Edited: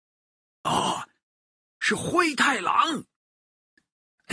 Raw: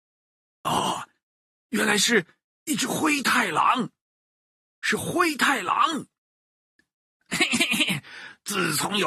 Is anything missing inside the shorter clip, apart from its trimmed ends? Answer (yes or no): yes